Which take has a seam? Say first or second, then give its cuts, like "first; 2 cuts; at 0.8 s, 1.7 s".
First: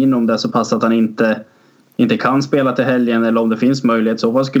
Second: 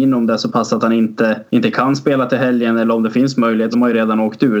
second; 2 cuts; at 1.5 s, 3.7 s